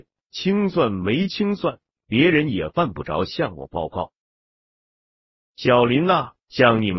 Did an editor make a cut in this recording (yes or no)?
no